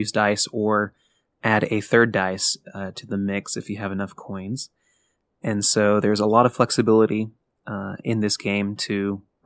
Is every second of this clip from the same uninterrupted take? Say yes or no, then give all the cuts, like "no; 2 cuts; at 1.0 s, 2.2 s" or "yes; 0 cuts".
yes; 0 cuts